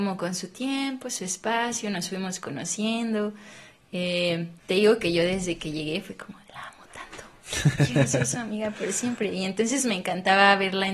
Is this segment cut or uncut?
cut